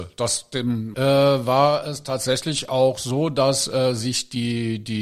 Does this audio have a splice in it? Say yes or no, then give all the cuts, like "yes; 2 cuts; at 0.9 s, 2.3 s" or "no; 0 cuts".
yes; 1 cut; at 0.9 s